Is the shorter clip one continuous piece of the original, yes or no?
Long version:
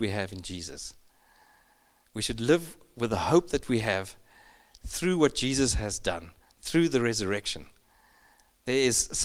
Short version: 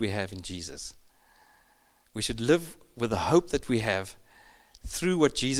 yes